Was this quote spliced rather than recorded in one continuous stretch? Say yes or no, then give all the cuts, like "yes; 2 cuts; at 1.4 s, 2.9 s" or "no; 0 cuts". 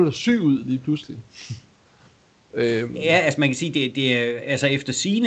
no; 0 cuts